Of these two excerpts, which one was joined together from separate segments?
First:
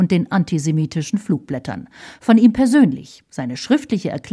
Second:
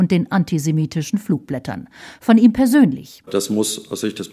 second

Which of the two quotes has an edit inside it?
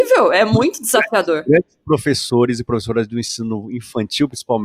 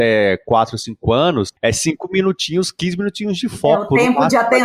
second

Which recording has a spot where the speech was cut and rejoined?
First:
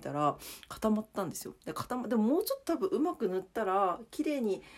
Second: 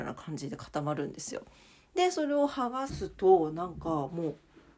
second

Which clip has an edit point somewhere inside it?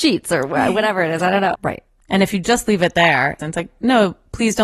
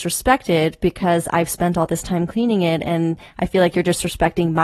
first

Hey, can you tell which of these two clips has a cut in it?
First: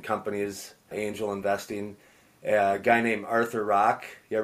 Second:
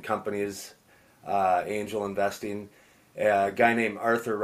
first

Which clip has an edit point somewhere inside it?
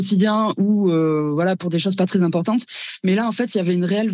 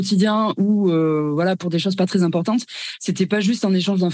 second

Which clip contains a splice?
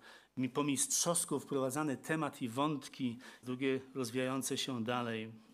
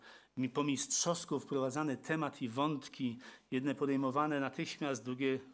first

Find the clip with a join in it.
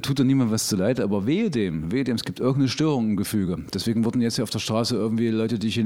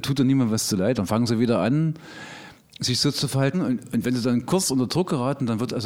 second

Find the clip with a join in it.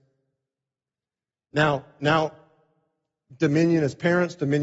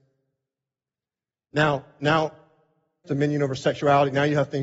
second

